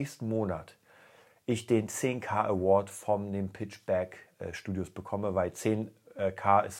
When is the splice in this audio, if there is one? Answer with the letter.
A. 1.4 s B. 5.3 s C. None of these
C